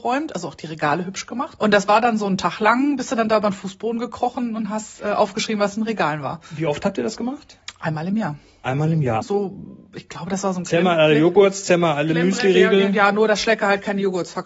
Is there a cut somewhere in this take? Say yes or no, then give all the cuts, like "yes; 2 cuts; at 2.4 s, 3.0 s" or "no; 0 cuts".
yes; 2 cuts; at 1.6 s, 9.2 s